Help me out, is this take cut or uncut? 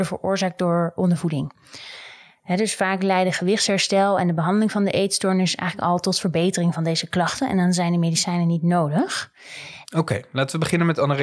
cut